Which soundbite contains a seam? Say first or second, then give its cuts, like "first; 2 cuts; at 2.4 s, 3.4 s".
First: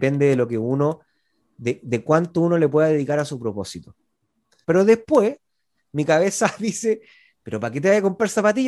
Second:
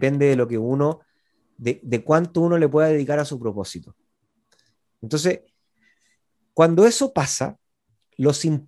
first; 1 cut; at 4.6 s